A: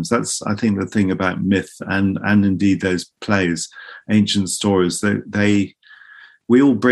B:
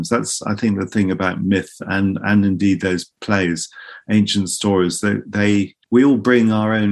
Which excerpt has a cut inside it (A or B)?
B